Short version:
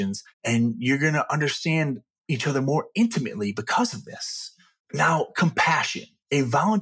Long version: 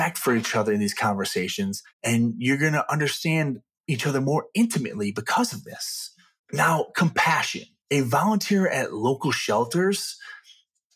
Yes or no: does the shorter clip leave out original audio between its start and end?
no